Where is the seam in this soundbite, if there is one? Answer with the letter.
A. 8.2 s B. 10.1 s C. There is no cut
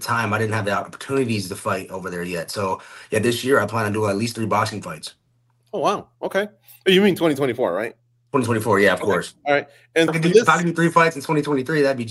B